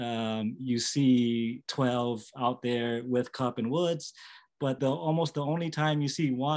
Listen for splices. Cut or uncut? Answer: cut